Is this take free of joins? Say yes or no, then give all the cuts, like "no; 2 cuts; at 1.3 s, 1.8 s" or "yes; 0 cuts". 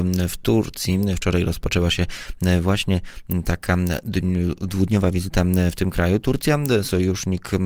yes; 0 cuts